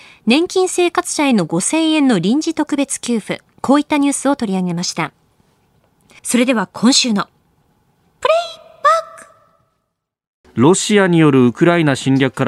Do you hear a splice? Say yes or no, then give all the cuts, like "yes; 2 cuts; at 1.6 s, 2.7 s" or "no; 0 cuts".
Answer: yes; 2 cuts; at 6.2 s, 10.4 s